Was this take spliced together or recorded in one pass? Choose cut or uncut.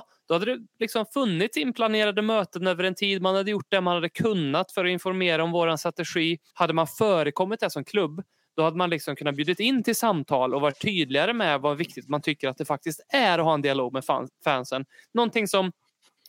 cut